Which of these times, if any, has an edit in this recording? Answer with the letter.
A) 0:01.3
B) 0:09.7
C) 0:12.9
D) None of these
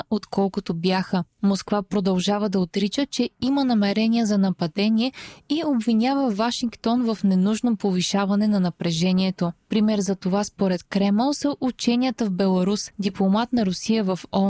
C